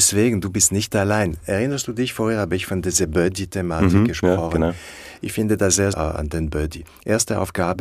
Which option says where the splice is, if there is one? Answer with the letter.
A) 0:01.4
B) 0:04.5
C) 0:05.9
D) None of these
C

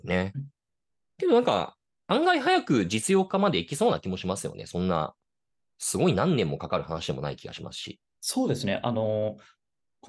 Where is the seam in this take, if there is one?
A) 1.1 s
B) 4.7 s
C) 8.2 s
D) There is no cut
C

